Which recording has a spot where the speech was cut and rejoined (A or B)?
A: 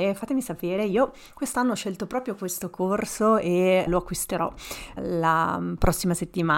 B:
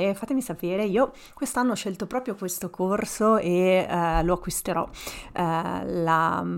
A